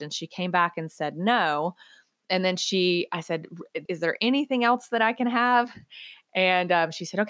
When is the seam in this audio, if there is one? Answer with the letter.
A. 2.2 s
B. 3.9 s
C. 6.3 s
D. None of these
B